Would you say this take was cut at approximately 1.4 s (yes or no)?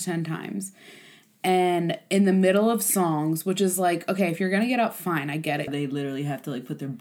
no